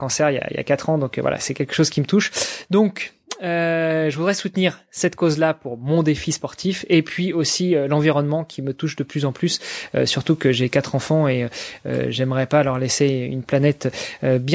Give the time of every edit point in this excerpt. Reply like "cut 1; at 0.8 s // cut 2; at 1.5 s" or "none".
none